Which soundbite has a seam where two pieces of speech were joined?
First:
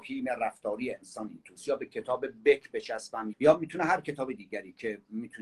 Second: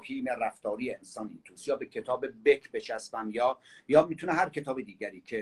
first; 1 cut; at 3.3 s

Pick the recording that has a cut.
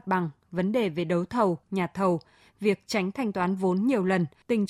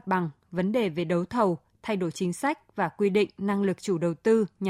first; 1 cut; at 1.6 s

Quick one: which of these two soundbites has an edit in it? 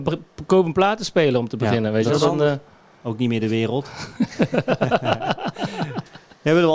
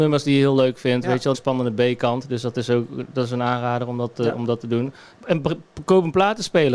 second; 2 cuts; at 1.3 s, 5.2 s

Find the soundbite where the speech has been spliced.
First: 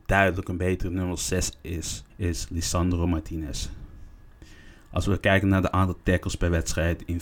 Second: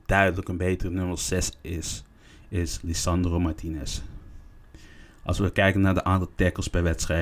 first; 1 cut; at 2.1 s

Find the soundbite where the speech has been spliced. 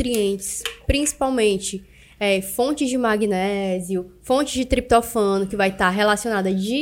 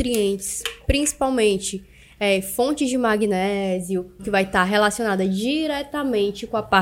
second; 1 cut; at 4.2 s

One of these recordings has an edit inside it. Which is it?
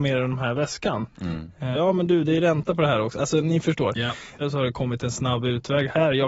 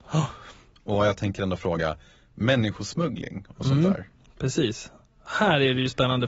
first; 2 cuts; at 1.7 s, 4.4 s

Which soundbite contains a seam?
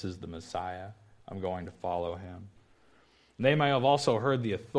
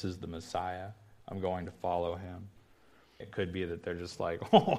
second; 1 cut; at 3.2 s

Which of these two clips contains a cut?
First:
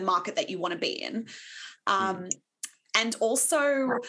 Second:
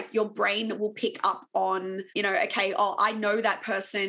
second; 1 cut; at 2.1 s

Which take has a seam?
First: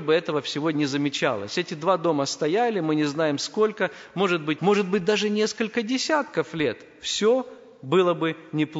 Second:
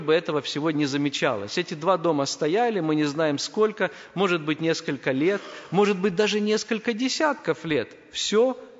first; 1 cut; at 4.6 s

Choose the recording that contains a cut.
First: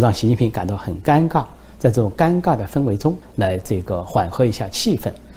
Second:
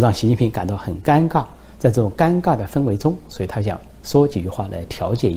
first; 1 cut; at 3.2 s

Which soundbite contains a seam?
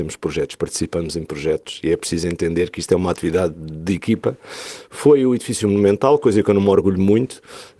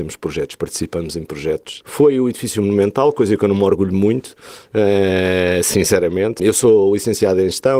second; 2 cuts; at 1.8 s, 6.4 s

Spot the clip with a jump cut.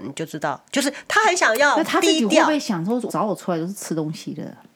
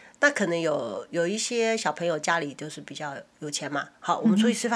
first; 1 cut; at 3.1 s

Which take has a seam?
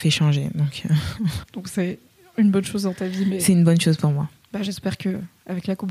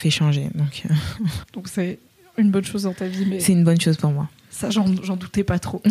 first; 1 cut; at 4.4 s

